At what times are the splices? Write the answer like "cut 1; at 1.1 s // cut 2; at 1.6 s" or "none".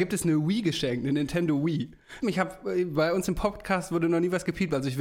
cut 1; at 2.2 s